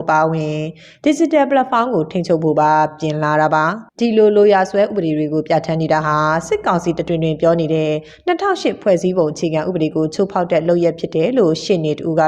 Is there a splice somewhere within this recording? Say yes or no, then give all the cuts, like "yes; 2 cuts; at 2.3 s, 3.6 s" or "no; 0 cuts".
yes; 1 cut; at 3.9 s